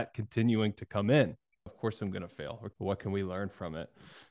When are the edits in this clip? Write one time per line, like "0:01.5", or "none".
0:01.7
0:02.7